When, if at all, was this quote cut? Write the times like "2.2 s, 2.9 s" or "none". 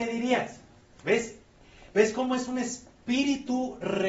0.9 s